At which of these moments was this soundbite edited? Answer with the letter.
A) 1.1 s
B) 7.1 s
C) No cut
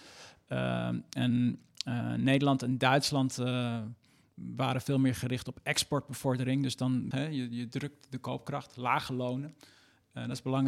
B